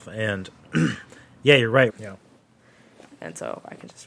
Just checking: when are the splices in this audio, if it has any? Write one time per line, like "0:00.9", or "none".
0:01.9